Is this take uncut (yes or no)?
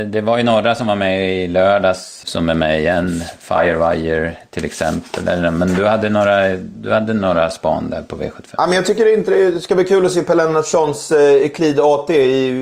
no